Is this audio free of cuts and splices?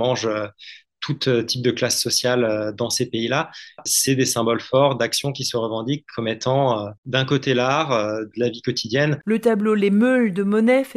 no; 1 cut; at 8.3 s

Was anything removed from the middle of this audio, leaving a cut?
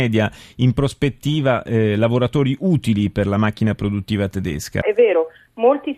yes; 1 cut; at 4.8 s

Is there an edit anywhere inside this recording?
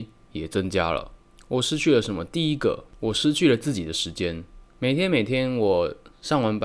no; 0 cuts

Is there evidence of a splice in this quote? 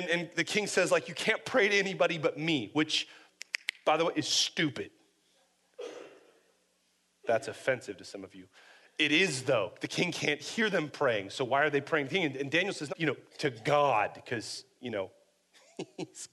yes; 1 cut; at 12.9 s

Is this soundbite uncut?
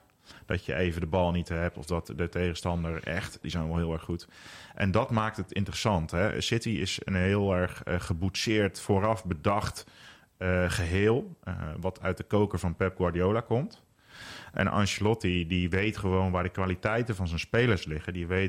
no; 1 cut; at 3.4 s

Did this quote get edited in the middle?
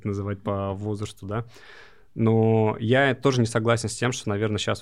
no; 0 cuts

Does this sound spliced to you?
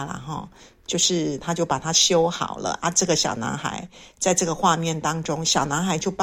no; 0 cuts

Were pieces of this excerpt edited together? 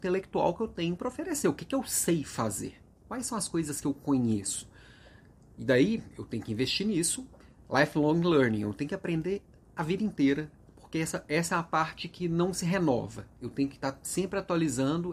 no; 0 cuts

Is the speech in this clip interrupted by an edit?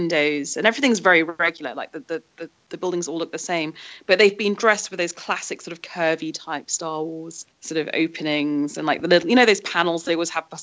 yes; 2 cuts; at 2.6 s, 7.5 s

